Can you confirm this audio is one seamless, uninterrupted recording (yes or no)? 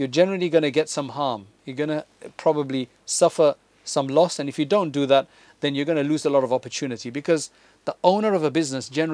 yes